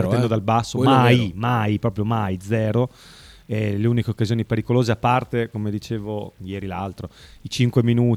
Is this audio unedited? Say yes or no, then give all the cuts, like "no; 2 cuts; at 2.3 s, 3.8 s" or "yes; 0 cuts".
yes; 0 cuts